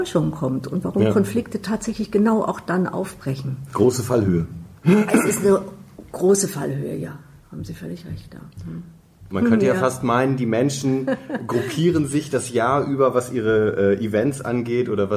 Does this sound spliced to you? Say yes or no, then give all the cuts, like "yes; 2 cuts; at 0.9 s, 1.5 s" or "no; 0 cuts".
yes; 2 cuts; at 4.8 s, 9.3 s